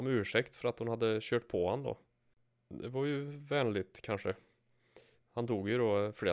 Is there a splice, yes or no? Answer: no